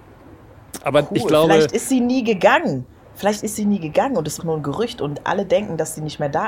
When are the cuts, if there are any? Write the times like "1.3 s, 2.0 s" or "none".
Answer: 4.4 s